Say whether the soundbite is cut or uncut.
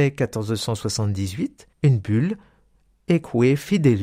cut